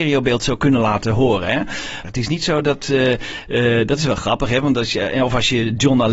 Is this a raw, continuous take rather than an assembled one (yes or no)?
no